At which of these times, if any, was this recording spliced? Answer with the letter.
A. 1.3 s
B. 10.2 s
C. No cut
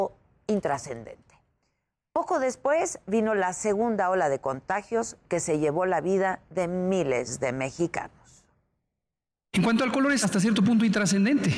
B